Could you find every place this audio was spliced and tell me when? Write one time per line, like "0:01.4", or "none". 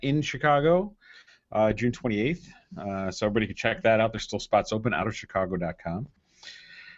none